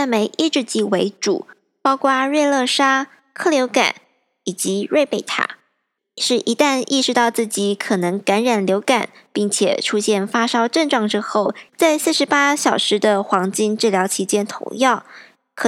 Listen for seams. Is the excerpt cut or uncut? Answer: cut